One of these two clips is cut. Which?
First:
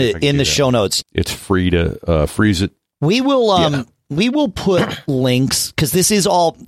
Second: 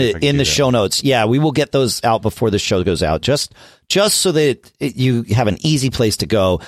first; 2 cuts; at 1.0 s, 2.9 s

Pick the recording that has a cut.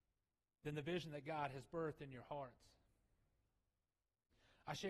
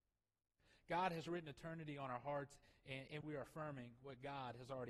second; 1 cut; at 3.2 s

